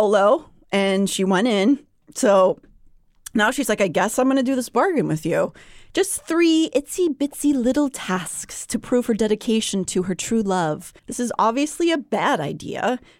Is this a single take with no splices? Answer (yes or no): no